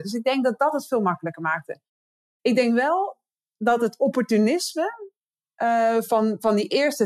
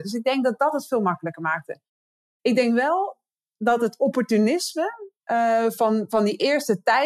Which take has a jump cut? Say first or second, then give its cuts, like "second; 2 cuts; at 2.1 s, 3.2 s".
second; 1 cut; at 5.2 s